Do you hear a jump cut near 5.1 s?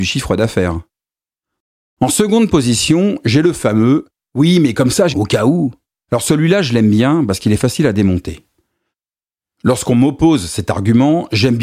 yes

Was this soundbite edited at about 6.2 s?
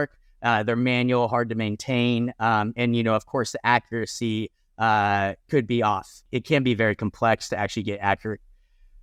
no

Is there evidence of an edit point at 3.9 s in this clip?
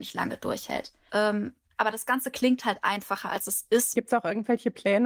yes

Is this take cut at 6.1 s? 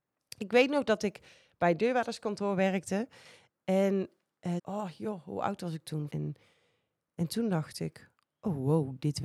yes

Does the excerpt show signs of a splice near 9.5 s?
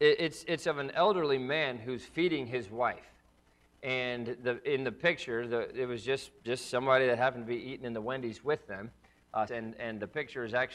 yes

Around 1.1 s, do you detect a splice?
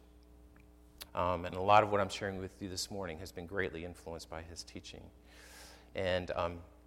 yes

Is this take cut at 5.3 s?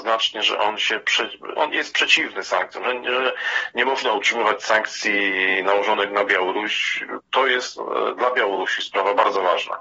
no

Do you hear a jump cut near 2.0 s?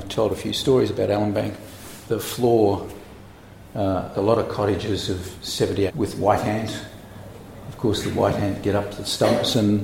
yes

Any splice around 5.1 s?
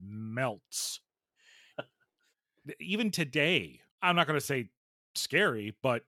no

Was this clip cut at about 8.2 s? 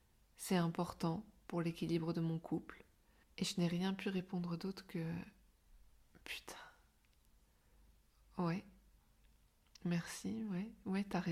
no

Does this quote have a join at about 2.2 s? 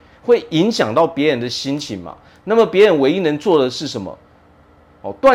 no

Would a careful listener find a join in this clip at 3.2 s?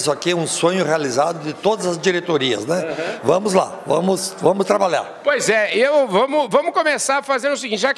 yes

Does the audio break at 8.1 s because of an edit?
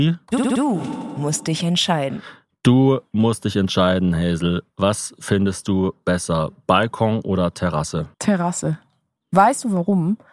yes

